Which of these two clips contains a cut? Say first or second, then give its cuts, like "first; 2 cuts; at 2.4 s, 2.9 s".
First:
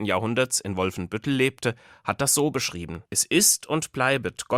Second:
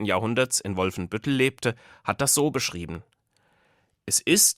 first; 1 cut; at 3.1 s